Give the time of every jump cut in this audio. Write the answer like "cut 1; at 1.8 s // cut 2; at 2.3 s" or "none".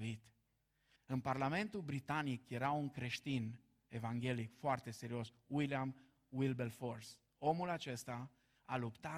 cut 1; at 1.0 s

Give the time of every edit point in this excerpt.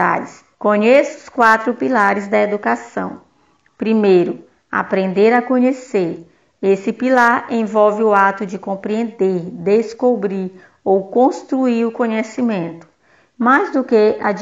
none

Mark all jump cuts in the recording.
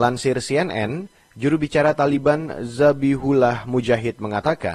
none

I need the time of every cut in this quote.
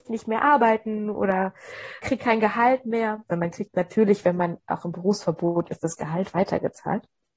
cut 1; at 2.0 s // cut 2; at 3.3 s

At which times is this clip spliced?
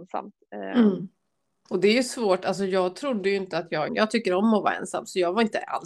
cut 1; at 1.7 s // cut 2; at 3.9 s

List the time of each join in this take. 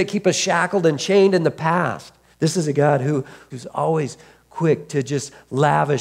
cut 1; at 2.3 s // cut 2; at 3.5 s

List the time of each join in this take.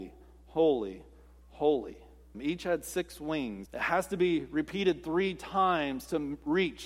cut 1; at 2.3 s // cut 2; at 3.7 s

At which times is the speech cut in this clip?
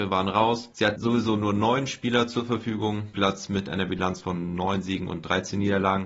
cut 1; at 3.1 s

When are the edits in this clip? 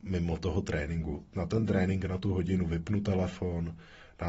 none

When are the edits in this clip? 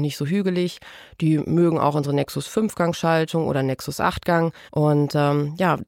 cut 1; at 4.7 s

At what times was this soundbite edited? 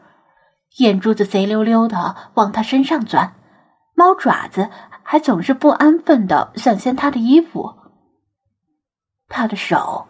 none

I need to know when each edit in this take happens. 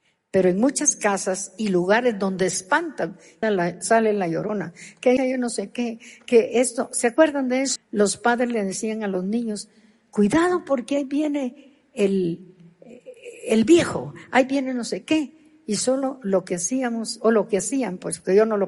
cut 1; at 3.4 s // cut 2; at 5.2 s // cut 3; at 7.8 s

